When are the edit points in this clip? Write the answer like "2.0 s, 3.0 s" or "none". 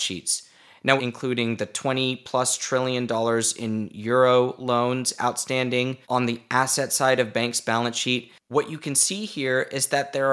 1.0 s, 6.0 s